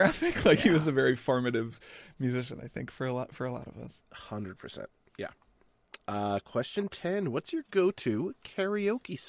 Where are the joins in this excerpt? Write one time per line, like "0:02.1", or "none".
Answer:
none